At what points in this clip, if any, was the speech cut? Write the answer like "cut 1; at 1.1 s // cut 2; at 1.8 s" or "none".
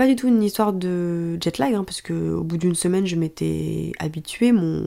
none